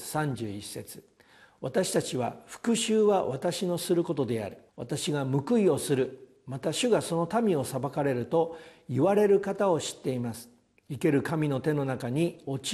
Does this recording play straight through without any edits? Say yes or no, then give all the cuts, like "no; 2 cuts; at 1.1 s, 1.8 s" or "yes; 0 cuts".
no; 1 cut; at 4.7 s